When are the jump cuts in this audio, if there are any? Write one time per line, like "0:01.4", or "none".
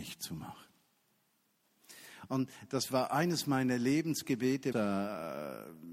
0:04.7